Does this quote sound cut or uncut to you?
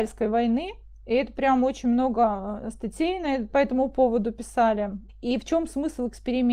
cut